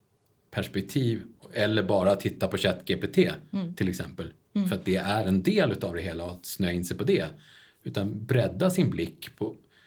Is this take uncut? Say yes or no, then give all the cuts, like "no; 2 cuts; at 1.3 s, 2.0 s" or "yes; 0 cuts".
yes; 0 cuts